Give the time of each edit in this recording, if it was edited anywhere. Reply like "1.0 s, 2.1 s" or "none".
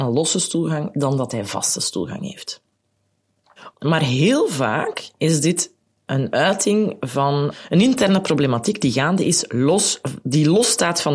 3.7 s